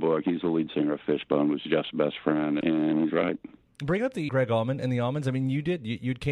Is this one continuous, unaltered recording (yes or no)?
no